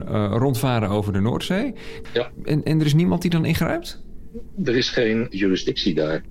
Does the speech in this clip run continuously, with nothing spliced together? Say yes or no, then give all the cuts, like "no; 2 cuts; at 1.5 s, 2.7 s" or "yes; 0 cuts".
no; 1 cut; at 2.0 s